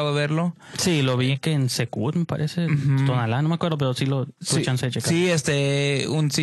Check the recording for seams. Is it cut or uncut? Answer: uncut